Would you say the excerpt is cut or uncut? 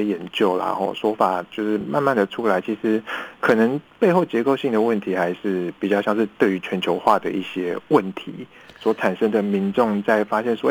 uncut